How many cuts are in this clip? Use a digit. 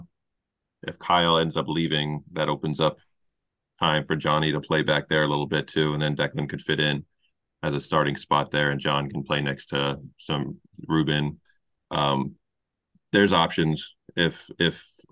0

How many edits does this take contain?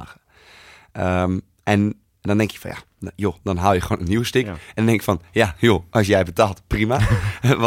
0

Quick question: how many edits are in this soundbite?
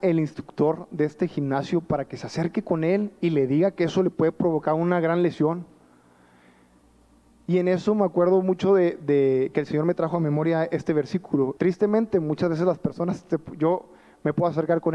1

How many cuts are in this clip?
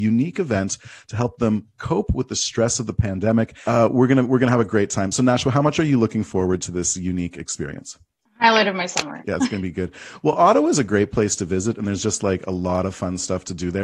0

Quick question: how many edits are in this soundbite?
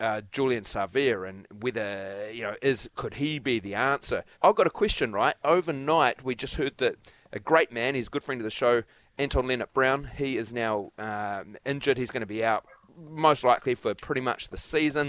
1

